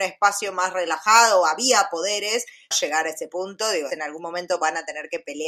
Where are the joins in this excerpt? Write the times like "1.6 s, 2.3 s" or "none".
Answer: 2.7 s, 3.9 s